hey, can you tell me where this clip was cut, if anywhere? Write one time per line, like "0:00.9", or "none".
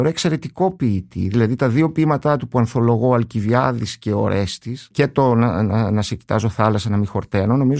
none